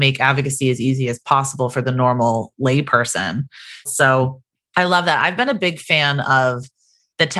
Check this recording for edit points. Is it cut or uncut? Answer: cut